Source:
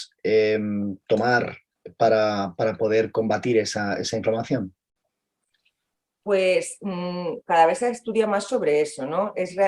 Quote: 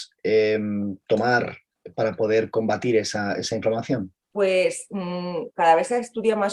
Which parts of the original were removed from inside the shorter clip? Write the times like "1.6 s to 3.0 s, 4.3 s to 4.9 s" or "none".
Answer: 1.9 s to 2.5 s, 4.8 s to 6.1 s